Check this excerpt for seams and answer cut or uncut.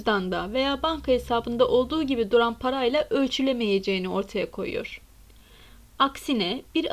uncut